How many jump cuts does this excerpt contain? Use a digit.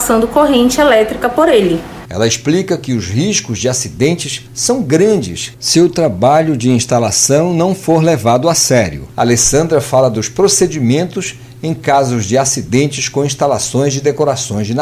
1